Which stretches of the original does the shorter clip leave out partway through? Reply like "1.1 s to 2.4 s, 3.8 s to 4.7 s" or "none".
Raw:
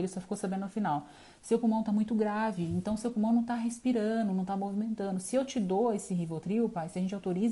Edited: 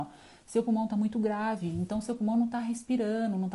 none